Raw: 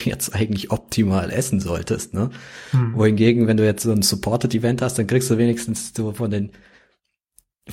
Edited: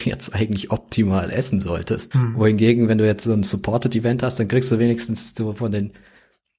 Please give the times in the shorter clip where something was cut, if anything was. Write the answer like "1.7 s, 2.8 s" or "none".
2.1 s